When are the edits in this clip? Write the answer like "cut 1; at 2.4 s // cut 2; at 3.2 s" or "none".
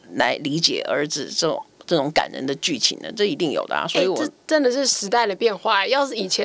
none

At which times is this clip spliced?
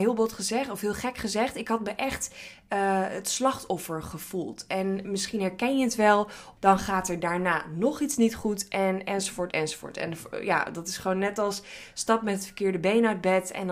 cut 1; at 6.6 s // cut 2; at 9.5 s

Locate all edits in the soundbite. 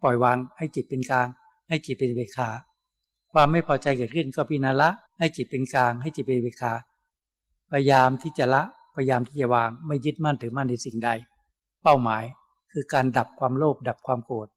cut 1; at 5.1 s

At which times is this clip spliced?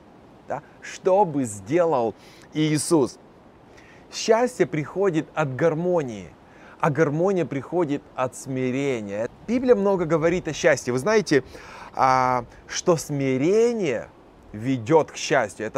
cut 1; at 9.3 s

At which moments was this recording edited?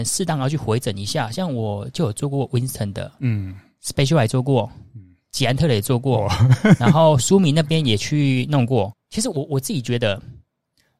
cut 1; at 8.9 s

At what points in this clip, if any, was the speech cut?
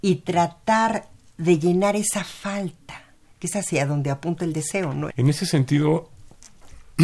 cut 1; at 5.1 s

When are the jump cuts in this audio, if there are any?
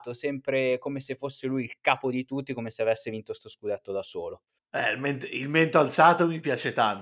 cut 1; at 4.6 s

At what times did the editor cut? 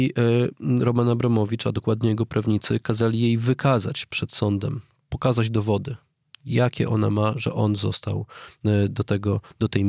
none

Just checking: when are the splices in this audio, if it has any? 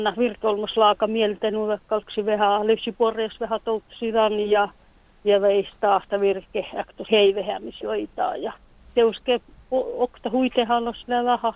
cut 1; at 7.1 s

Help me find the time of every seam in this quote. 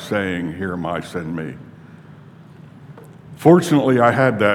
none

